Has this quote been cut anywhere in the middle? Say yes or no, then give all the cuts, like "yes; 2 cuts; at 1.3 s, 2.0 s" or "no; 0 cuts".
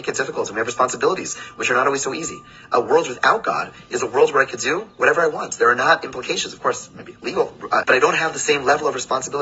yes; 1 cut; at 7.8 s